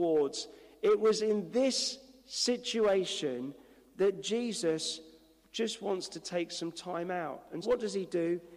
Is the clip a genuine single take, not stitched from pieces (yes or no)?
no